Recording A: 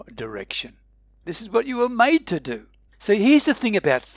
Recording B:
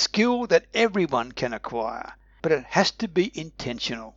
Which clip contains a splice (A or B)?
A